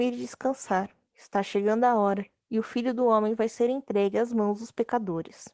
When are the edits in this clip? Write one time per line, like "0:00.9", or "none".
none